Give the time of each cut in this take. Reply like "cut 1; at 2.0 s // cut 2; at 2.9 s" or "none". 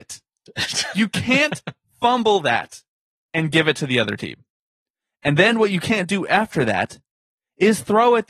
none